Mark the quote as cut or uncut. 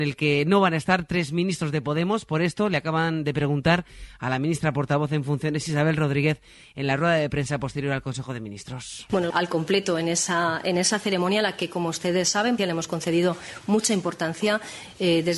cut